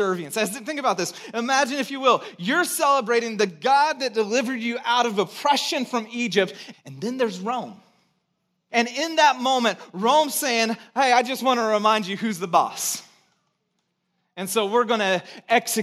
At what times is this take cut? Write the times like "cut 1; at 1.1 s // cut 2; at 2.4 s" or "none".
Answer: cut 1; at 6.7 s // cut 2; at 8.7 s